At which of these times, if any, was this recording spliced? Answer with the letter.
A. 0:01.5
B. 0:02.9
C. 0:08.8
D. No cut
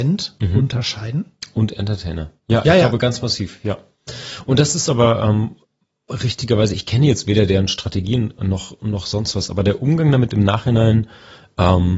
D